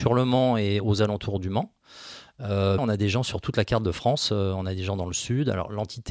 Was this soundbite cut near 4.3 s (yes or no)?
no